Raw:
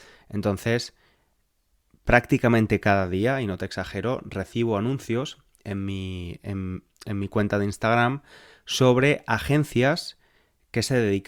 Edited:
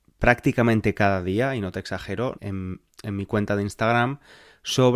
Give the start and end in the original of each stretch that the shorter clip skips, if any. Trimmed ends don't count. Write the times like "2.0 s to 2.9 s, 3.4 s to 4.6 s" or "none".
4.2 s to 6.4 s